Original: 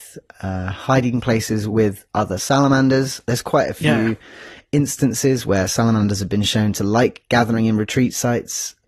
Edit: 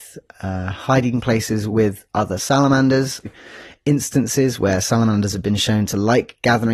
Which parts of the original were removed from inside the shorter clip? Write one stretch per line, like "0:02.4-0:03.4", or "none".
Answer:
0:03.2-0:04.1